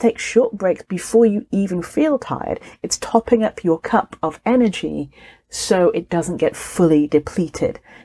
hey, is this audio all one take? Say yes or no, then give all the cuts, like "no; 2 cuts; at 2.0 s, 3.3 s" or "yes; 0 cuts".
yes; 0 cuts